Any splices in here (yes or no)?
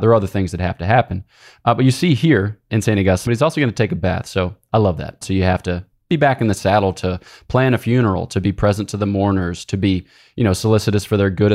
yes